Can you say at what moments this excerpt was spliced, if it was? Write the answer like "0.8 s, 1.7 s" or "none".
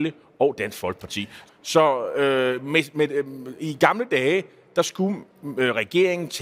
1.5 s